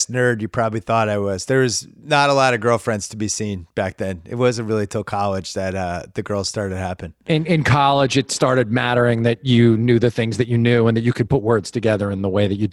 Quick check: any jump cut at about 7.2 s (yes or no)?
no